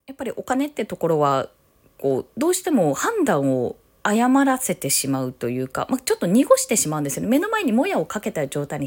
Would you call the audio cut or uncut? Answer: uncut